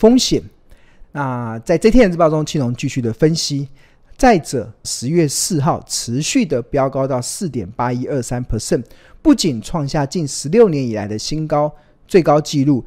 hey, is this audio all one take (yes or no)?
no